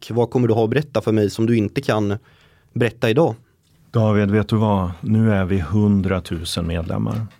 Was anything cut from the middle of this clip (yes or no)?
no